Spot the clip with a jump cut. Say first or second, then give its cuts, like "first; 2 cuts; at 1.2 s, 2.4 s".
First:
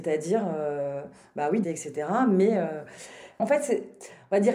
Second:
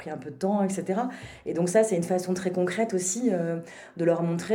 first; 1 cut; at 1.6 s